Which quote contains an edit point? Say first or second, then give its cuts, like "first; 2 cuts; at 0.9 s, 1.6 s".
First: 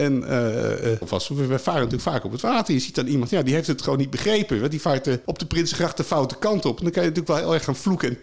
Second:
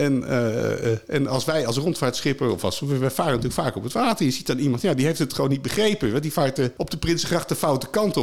first; 1 cut; at 1.0 s